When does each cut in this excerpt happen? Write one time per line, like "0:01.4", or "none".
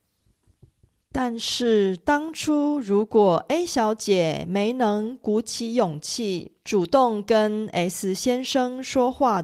0:06.6